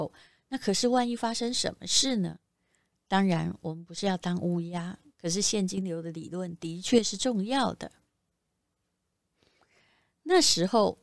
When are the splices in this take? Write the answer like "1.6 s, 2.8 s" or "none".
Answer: none